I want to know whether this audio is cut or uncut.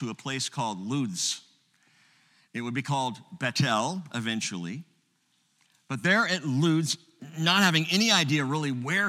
uncut